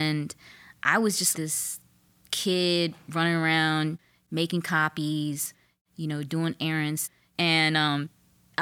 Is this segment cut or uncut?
cut